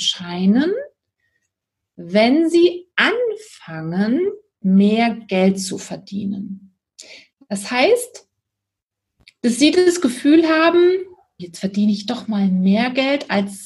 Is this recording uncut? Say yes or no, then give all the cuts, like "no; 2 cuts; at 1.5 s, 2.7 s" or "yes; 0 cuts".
no; 1 cut; at 11.4 s